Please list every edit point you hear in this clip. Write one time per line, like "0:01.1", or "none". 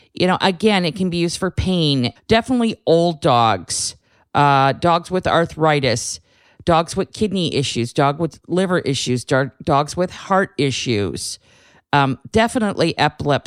0:02.2